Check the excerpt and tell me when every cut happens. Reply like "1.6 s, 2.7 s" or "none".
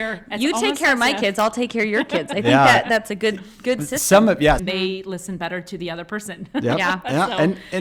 4.6 s